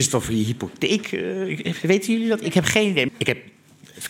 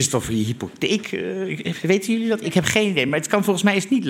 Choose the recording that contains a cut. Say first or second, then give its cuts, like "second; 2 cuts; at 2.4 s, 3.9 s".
first; 1 cut; at 3.1 s